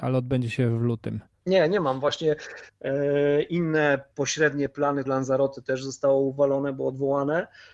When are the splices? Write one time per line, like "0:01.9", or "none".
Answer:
0:02.7
0:05.1